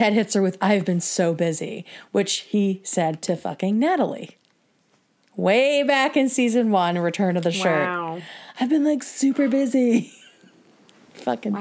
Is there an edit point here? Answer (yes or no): no